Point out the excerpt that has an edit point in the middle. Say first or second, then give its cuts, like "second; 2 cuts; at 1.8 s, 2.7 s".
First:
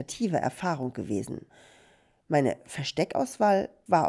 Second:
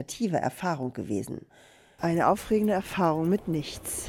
second; 1 cut; at 2.0 s